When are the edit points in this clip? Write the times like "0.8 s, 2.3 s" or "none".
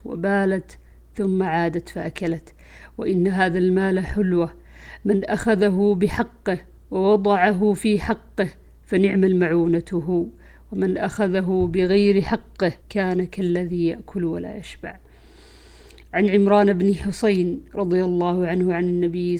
12.8 s